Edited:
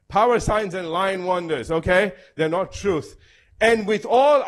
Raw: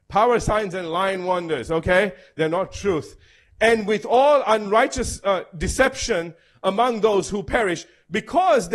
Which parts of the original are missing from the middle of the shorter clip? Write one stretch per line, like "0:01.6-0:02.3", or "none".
none